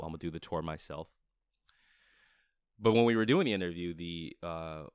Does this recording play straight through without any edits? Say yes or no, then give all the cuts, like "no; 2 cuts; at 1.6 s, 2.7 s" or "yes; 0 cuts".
yes; 0 cuts